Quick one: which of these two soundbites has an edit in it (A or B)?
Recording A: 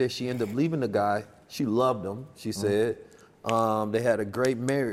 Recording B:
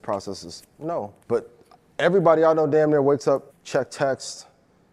B